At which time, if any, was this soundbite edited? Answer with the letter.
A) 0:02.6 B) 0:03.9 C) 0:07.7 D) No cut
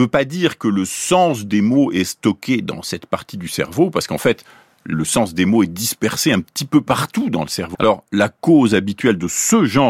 C